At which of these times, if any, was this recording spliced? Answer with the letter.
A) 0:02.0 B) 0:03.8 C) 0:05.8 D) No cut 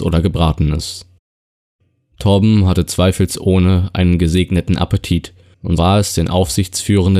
C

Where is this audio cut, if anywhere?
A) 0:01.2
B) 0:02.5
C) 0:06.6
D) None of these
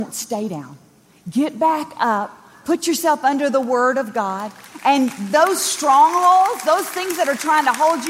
D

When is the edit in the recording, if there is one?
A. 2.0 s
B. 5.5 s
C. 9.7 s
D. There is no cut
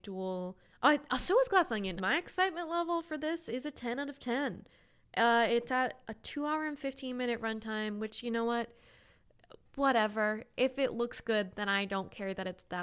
A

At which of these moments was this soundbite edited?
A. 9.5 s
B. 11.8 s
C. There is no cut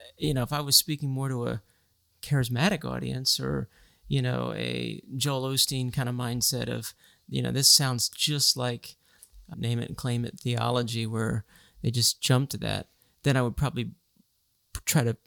A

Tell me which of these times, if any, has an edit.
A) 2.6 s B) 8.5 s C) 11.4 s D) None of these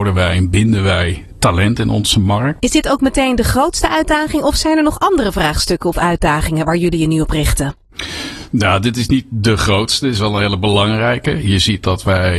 A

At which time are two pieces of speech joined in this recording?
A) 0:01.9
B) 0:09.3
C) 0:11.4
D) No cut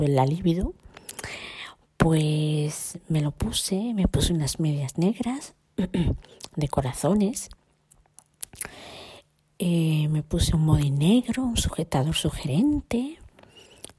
D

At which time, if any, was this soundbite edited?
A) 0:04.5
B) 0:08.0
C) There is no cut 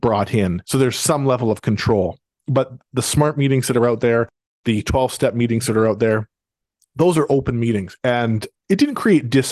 B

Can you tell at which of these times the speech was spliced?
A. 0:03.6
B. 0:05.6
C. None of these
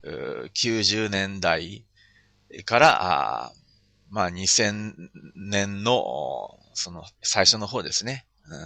C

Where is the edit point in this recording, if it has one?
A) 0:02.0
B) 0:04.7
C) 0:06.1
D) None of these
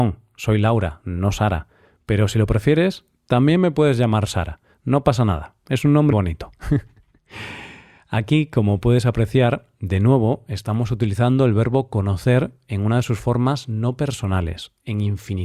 C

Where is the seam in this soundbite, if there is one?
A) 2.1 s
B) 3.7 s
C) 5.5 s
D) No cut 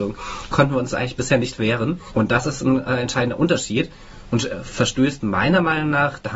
A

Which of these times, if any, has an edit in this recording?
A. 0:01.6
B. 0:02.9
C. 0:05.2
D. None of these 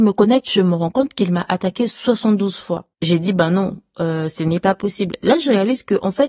B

